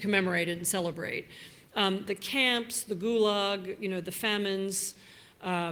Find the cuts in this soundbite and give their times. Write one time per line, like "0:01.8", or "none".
none